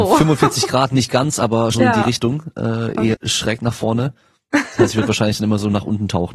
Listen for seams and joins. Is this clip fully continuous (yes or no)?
no